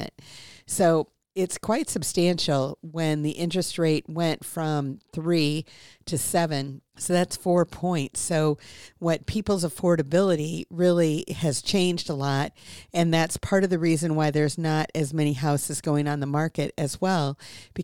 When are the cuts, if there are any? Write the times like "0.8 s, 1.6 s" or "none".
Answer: 6.9 s